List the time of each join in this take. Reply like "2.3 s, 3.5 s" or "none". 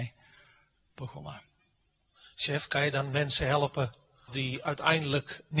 4.3 s